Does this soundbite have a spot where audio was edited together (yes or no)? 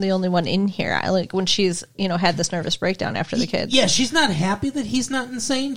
no